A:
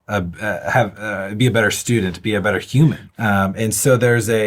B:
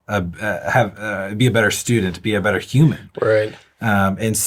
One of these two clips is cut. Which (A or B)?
A